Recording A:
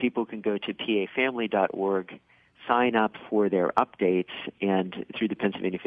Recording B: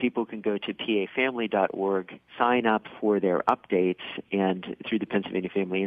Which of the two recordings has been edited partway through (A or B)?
B